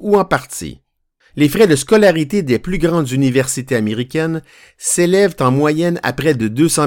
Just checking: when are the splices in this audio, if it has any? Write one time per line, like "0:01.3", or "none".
0:01.2